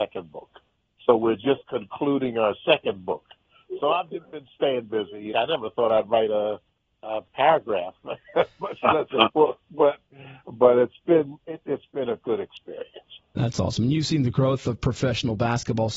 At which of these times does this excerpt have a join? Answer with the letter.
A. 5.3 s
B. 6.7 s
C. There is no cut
A